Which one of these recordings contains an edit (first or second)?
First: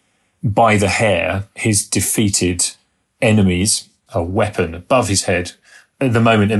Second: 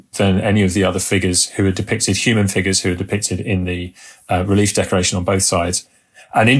first